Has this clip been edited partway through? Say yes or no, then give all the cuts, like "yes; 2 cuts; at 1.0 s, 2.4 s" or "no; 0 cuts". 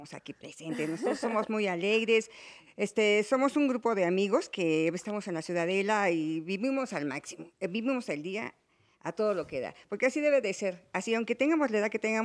no; 0 cuts